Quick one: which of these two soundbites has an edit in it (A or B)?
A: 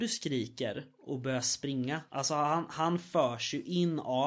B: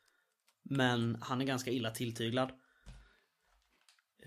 A